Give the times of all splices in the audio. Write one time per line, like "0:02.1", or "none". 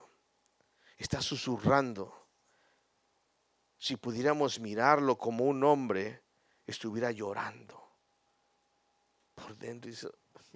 none